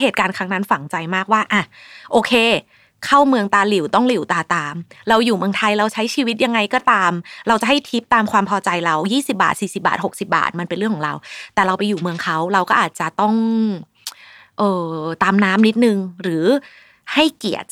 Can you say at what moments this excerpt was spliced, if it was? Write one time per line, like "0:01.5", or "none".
none